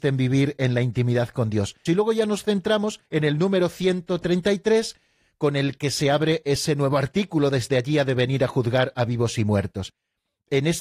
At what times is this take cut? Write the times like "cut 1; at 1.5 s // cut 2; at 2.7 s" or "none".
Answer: cut 1; at 1.9 s // cut 2; at 3.1 s

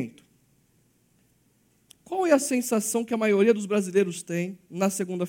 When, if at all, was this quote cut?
none

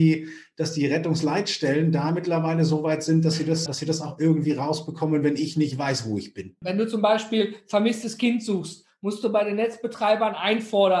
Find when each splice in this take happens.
cut 1; at 3.7 s // cut 2; at 6.6 s

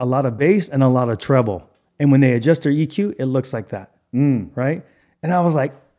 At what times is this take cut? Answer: none

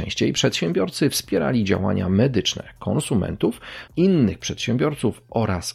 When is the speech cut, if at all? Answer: cut 1; at 3.9 s

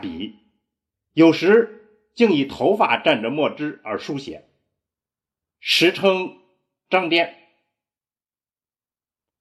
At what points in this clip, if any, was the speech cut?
none

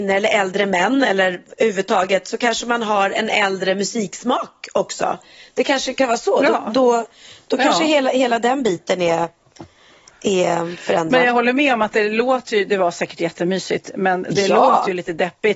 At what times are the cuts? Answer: none

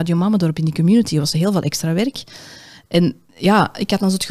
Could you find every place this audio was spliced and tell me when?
none

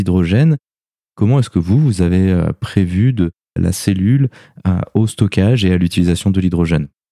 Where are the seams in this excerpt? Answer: cut 1; at 1.0 s // cut 2; at 3.6 s

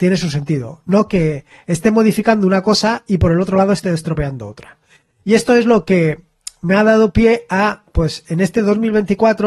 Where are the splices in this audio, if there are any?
none

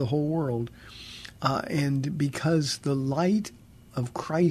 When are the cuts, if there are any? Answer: none

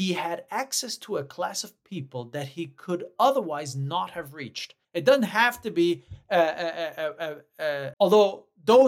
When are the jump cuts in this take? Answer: cut 1; at 4.8 s // cut 2; at 7.9 s

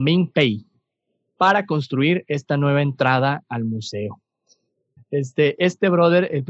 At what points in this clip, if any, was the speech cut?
cut 1; at 5.0 s

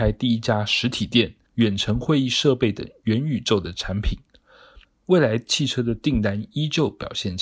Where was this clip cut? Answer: cut 1; at 1.5 s // cut 2; at 4.8 s

